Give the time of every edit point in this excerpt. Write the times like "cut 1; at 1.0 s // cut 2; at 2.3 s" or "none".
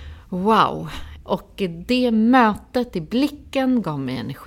cut 1; at 1.2 s